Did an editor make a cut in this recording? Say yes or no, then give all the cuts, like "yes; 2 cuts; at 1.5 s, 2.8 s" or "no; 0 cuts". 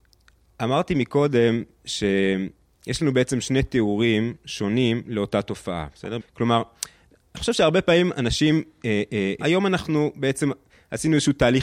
yes; 2 cuts; at 6.2 s, 9.4 s